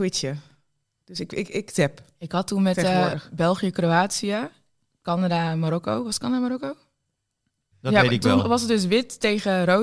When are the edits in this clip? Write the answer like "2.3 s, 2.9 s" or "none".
1.5 s, 7.7 s